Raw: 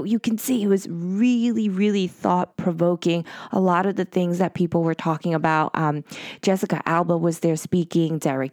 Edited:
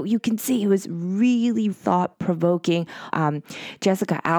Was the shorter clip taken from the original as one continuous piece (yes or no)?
no